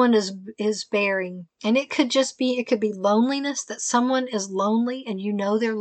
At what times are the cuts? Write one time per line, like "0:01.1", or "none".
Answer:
0:01.5

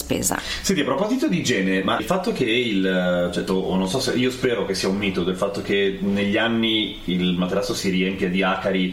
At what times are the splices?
0:02.0
0:03.5

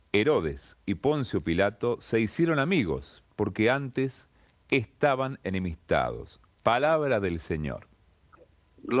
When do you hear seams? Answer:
none

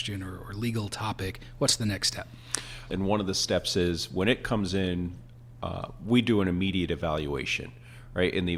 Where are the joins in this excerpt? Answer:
0:02.9

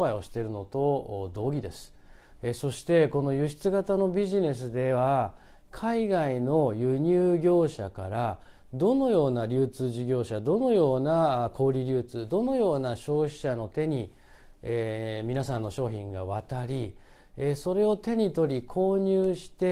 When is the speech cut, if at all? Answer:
none

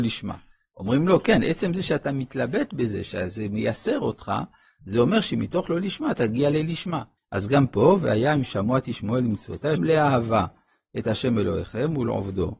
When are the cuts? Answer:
0:07.2
0:09.8

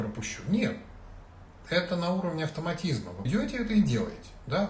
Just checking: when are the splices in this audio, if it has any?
0:03.3

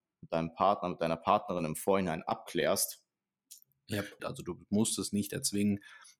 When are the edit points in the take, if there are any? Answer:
0:04.2

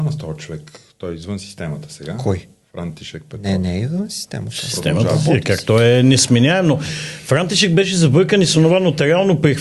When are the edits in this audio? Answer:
none

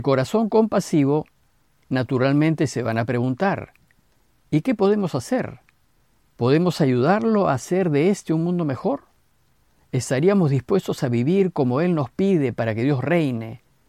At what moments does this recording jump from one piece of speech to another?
none

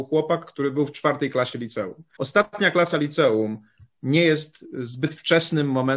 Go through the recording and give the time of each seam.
0:02.2

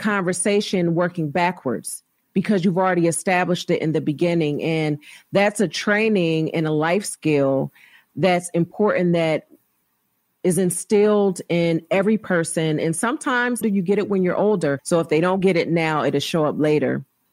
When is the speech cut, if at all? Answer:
0:13.6
0:14.8

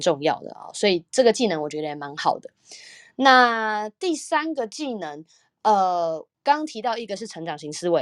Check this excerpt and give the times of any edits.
0:06.3

